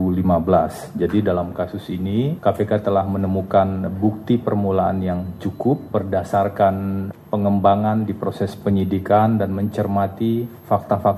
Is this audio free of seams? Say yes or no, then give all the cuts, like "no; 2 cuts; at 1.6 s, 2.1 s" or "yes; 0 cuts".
yes; 0 cuts